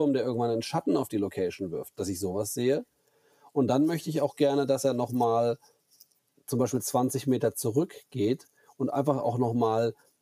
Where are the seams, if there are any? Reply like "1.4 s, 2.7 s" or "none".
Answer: none